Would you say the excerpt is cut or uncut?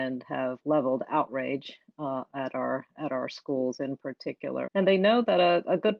cut